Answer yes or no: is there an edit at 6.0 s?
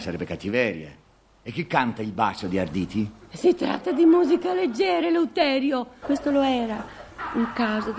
yes